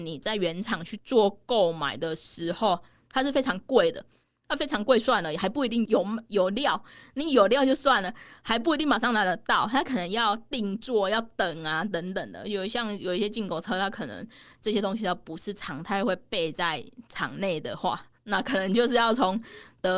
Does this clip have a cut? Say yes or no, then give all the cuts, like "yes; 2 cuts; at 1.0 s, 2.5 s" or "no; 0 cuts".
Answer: no; 0 cuts